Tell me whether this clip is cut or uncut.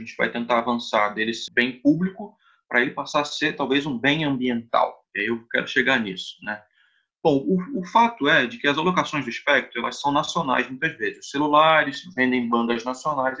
cut